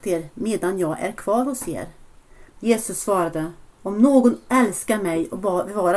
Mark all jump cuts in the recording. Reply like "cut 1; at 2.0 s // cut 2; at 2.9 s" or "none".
cut 1; at 2.5 s // cut 2; at 3.7 s